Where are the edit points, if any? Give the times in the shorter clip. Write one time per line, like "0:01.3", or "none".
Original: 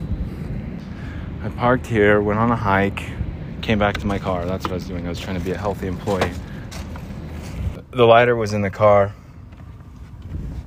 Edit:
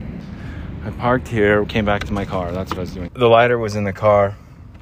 0:01.6
0:03.1